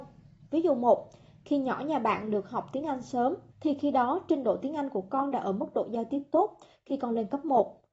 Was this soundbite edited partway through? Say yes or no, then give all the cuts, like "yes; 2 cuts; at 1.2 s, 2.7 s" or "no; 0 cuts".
yes; 1 cut; at 3.5 s